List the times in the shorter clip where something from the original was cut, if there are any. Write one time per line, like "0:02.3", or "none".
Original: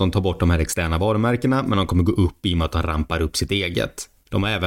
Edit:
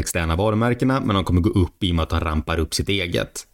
none